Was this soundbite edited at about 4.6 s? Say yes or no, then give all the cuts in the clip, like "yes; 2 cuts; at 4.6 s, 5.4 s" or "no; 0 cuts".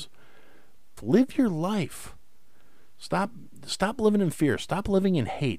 no; 1 cut; at 1.0 s